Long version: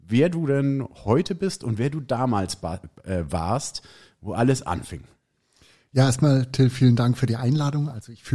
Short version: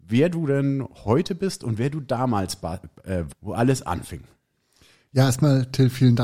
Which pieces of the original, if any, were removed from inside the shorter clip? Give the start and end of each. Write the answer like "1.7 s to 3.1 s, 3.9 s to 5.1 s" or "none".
3.3 s to 4.1 s